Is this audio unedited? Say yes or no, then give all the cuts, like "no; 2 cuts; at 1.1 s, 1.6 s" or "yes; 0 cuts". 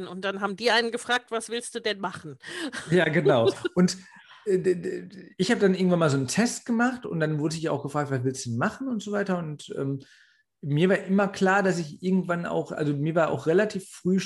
yes; 0 cuts